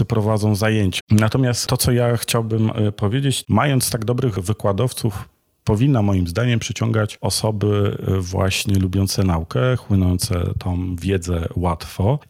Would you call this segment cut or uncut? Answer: cut